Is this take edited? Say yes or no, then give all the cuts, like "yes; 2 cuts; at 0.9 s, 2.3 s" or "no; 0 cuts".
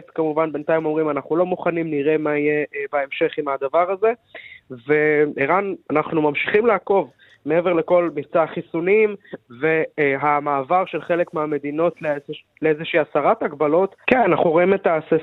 yes; 1 cut; at 14.0 s